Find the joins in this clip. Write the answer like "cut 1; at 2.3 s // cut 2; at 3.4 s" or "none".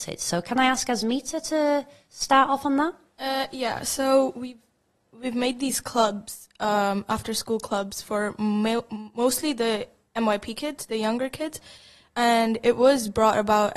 none